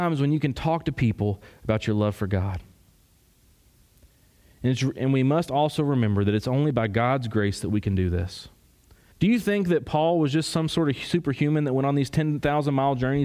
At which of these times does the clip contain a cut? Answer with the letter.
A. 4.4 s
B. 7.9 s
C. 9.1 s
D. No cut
C